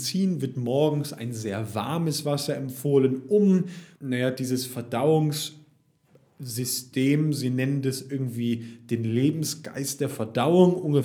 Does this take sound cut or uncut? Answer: cut